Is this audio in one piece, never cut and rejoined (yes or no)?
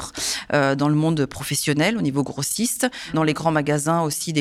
yes